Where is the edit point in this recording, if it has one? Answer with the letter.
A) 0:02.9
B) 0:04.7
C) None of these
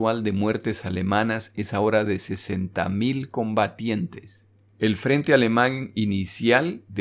B